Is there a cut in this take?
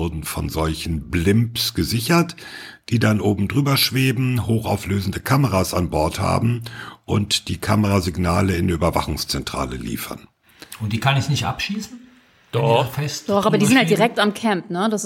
no; 0 cuts

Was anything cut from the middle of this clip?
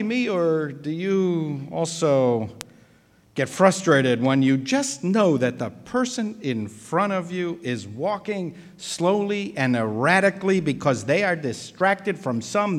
no; 0 cuts

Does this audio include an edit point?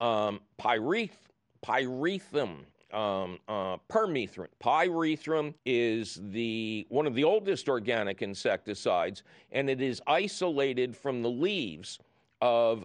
yes; 2 cuts; at 4.5 s, 5.6 s

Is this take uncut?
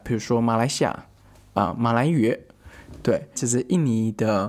no; 1 cut; at 3.3 s

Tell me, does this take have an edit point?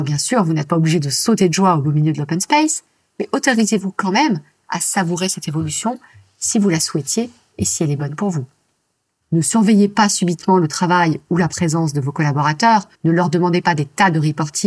yes; 2 cuts; at 9.2 s, 12.9 s

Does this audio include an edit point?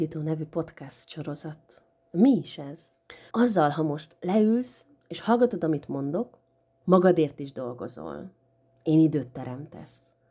yes; 2 cuts; at 3.3 s, 6.8 s

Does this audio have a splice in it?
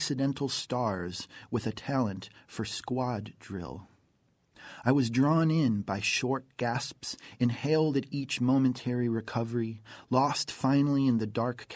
no; 0 cuts

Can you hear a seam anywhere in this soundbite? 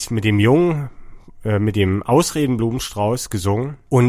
no; 0 cuts

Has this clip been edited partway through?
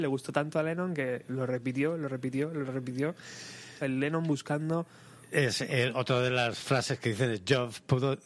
yes; 1 cut; at 3.8 s

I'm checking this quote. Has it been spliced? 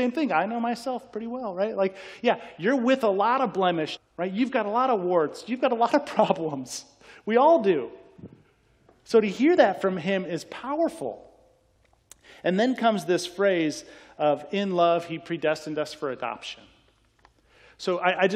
yes; 1 cut; at 4.0 s

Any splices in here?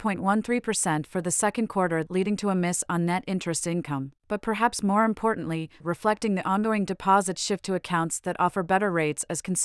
yes; 3 cuts; at 2.1 s, 4.2 s, 5.8 s

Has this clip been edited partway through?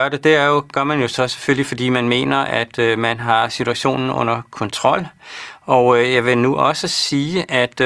no; 0 cuts

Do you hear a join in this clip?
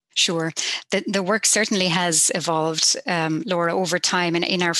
no; 0 cuts

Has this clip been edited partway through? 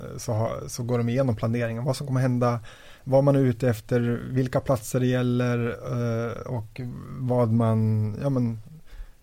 no; 0 cuts

